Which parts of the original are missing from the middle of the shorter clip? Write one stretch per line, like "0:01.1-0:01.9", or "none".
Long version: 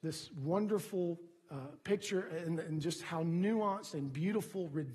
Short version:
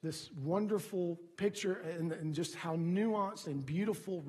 0:01.3-0:01.8